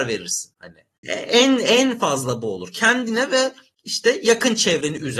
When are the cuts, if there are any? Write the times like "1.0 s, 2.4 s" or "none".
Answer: 1.0 s